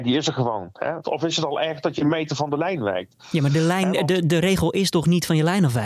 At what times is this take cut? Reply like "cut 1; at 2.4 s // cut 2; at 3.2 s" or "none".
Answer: cut 1; at 1.0 s

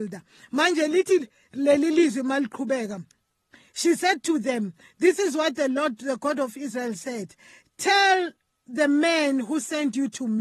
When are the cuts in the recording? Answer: none

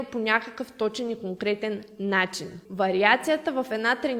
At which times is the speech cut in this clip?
cut 1; at 2.7 s

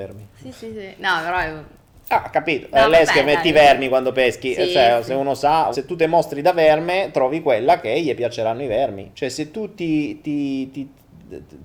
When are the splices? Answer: cut 1; at 5.7 s // cut 2; at 9.1 s

